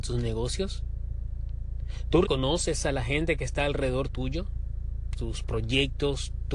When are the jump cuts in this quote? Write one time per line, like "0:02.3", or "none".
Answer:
0:02.2
0:05.1